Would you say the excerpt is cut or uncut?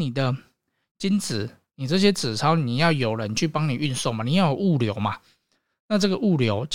cut